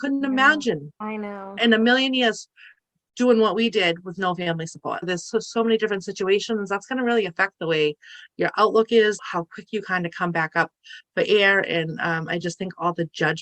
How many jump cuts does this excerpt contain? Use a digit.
0